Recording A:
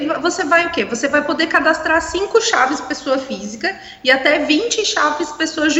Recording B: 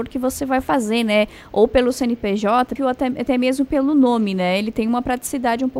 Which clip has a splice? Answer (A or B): B